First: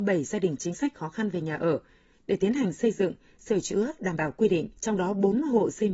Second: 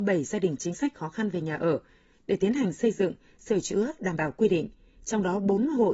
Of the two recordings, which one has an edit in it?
first; 1 cut; at 4.8 s

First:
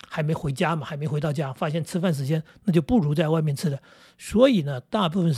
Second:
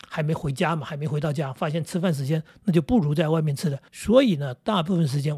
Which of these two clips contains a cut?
second; 1 cut; at 3.9 s

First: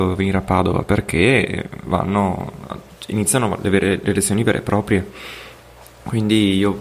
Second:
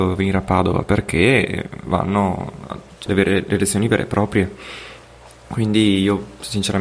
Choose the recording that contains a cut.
second; 1 cut; at 3.1 s

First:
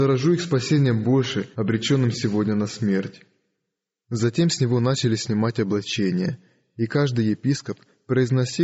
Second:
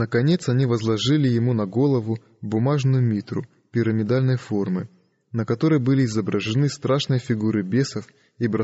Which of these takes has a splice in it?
first; 1 cut; at 1.5 s

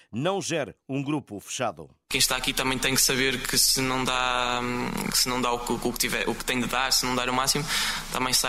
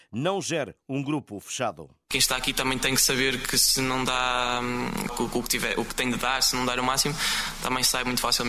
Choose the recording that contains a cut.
second; 1 cut; at 5.1 s

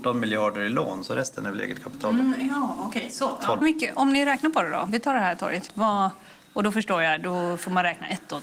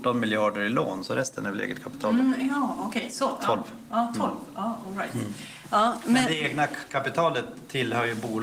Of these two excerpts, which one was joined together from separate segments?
first; 2 cuts; at 3.6 s, 5.7 s

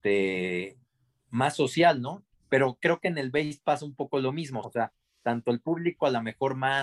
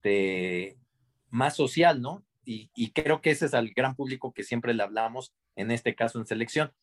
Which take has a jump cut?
first; 2 cuts; at 2.3 s, 4.6 s

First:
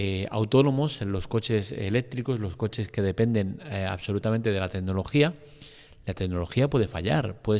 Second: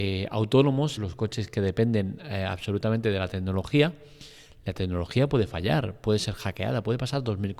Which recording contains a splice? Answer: second; 1 cut; at 1.0 s

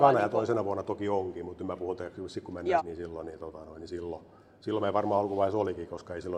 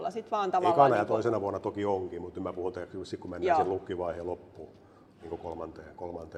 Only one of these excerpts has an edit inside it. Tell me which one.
first; 1 cut; at 2.8 s

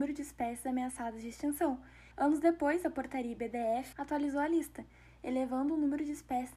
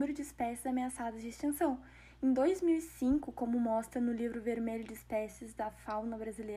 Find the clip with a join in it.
first; 2 cuts; at 2.1 s, 3.9 s

